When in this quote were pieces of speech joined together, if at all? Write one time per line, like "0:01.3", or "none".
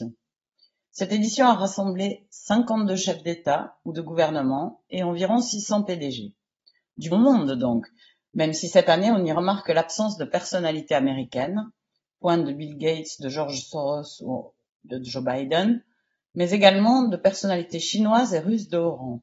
0:07.1